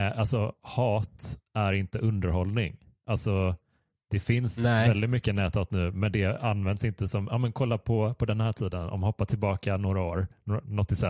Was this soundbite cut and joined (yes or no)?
no